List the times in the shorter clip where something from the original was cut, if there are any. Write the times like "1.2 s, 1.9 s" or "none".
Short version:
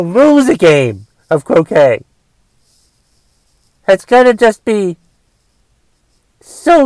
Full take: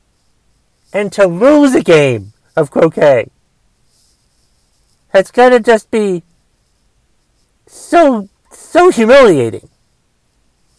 none